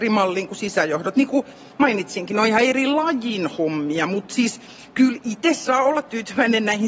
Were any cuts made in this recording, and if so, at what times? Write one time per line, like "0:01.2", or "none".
none